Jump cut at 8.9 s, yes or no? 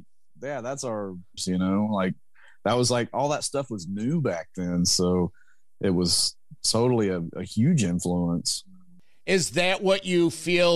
no